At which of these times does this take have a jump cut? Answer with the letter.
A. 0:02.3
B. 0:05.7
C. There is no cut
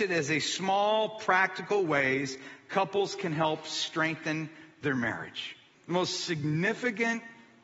B